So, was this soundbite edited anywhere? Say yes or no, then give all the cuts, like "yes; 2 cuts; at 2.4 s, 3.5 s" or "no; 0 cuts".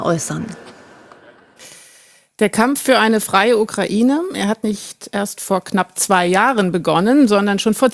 no; 0 cuts